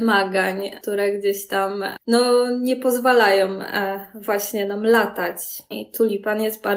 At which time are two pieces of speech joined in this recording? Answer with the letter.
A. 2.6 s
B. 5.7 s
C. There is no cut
B